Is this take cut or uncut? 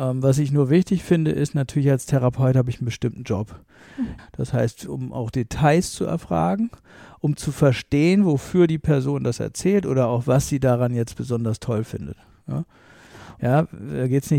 cut